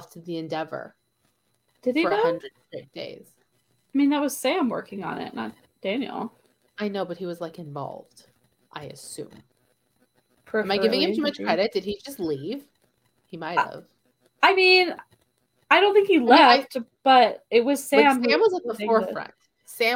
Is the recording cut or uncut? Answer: uncut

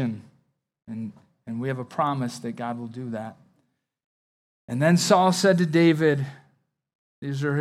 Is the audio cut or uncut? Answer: uncut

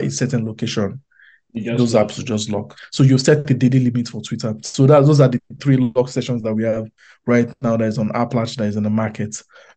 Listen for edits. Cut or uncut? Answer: cut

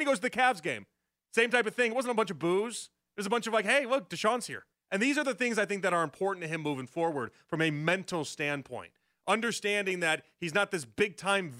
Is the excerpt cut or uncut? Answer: cut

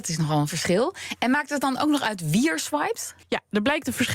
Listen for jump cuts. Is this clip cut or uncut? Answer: cut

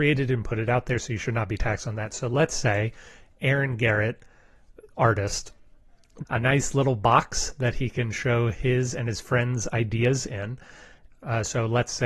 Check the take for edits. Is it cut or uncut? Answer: cut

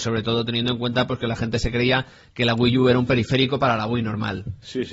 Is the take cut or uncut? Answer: uncut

